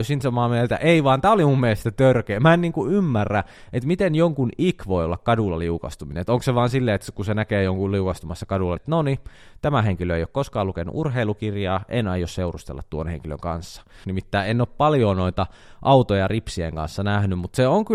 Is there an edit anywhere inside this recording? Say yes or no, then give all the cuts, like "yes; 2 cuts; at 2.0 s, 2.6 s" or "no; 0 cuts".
yes; 2 cuts; at 8.8 s, 14.0 s